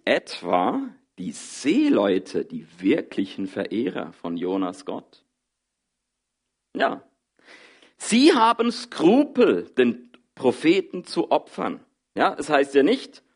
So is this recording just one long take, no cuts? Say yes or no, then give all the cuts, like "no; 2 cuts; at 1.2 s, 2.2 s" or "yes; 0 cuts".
yes; 0 cuts